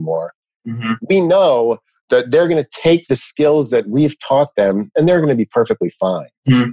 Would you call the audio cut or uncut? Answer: uncut